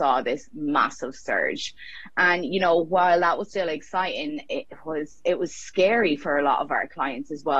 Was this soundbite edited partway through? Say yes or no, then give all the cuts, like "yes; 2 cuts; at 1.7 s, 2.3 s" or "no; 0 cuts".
no; 0 cuts